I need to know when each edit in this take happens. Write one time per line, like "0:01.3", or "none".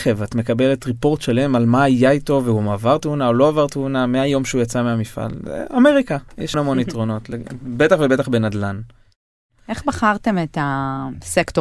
0:06.5